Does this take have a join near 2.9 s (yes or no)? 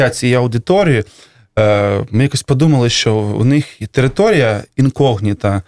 no